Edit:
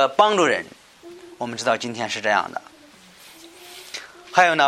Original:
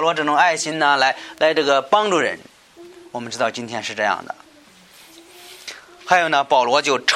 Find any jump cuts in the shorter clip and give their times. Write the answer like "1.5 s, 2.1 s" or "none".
none